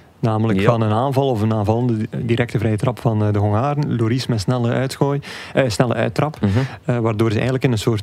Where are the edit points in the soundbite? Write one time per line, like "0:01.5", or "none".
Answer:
none